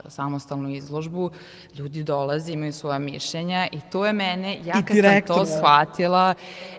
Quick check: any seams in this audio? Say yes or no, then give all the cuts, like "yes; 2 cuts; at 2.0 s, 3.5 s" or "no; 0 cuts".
no; 0 cuts